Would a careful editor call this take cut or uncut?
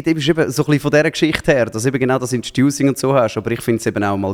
uncut